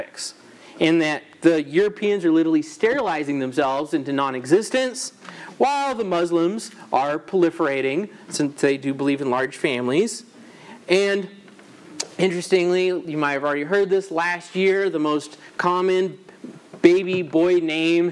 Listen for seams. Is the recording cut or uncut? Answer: uncut